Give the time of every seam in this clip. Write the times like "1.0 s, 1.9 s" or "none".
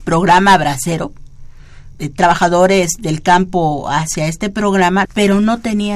1.9 s, 5.0 s